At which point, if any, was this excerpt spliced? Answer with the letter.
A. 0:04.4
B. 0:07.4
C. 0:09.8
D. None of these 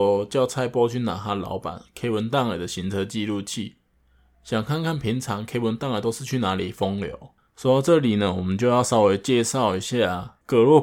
D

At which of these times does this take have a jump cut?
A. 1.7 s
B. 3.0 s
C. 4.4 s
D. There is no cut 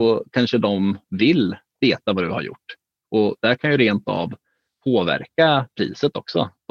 D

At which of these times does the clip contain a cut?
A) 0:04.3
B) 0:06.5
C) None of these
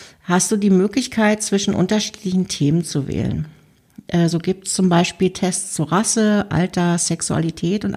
C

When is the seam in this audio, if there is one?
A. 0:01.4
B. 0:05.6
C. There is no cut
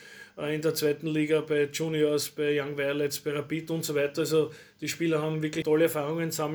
B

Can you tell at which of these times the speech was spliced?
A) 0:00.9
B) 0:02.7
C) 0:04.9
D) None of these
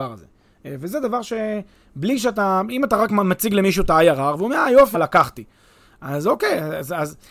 C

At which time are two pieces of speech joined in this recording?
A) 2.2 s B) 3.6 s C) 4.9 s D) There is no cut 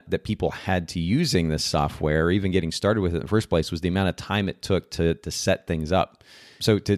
D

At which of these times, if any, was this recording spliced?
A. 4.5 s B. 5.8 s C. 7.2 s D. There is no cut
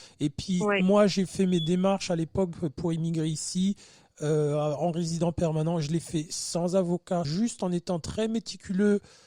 C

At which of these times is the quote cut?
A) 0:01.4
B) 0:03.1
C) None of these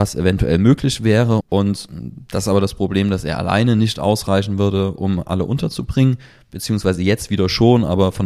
A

